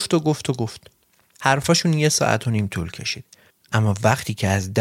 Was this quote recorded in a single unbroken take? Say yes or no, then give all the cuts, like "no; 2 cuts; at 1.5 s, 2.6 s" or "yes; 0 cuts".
yes; 0 cuts